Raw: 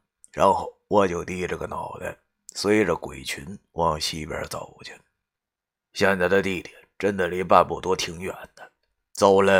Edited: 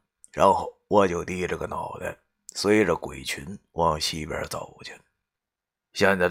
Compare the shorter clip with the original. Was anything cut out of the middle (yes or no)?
no